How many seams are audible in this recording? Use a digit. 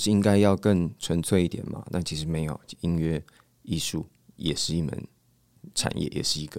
1